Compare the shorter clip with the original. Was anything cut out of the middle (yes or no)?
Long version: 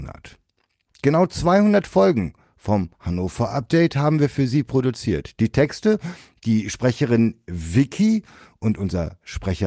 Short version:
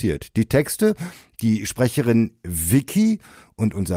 no